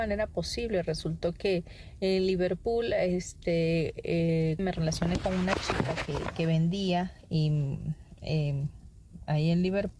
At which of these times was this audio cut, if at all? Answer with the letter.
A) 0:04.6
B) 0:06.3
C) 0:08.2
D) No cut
A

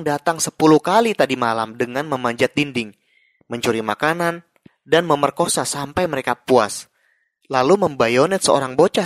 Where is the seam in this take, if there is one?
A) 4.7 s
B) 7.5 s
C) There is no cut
A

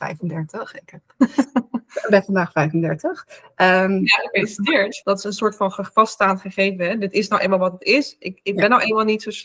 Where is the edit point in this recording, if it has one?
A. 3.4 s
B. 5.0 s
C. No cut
B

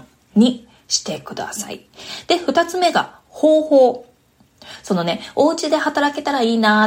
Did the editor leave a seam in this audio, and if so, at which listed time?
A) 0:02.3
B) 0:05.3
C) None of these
C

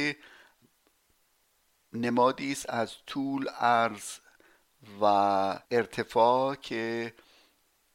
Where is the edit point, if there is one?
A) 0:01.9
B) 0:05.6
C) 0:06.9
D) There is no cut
B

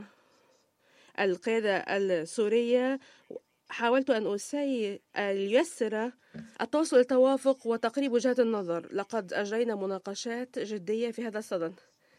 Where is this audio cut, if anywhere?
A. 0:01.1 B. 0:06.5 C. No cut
B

